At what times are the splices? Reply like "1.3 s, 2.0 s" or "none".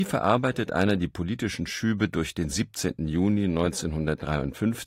none